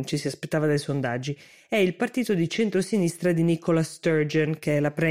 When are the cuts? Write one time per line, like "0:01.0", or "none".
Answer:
none